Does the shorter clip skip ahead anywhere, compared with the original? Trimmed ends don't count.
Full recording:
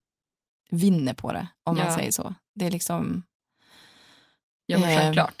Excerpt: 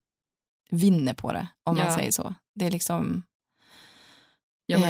no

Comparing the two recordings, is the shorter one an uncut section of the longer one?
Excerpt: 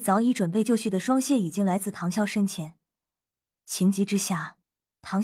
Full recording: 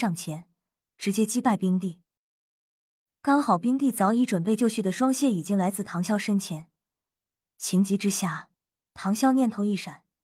yes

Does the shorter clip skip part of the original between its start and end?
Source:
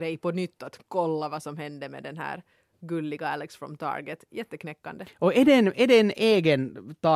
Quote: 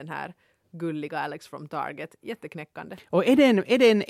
no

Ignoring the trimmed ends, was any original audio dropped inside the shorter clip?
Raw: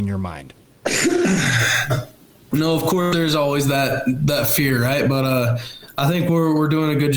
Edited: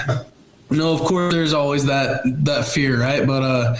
no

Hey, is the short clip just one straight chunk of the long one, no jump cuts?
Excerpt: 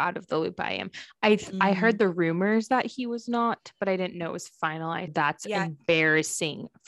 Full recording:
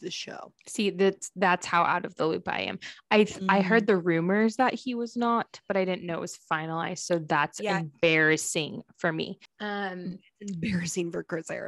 no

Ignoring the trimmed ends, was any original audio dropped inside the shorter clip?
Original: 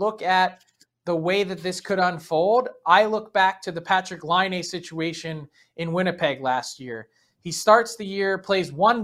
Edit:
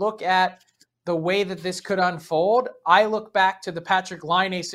no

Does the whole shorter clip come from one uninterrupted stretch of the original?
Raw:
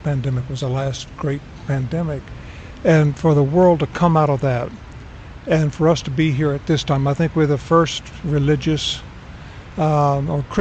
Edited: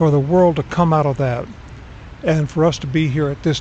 yes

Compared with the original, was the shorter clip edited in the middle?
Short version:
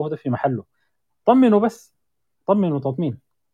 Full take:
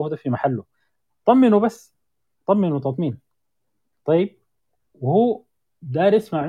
no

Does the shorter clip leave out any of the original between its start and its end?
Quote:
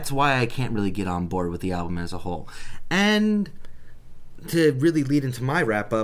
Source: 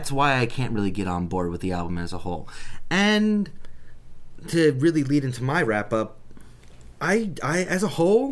no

